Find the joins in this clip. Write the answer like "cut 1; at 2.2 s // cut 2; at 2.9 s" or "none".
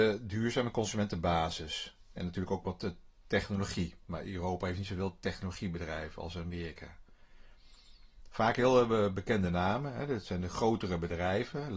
none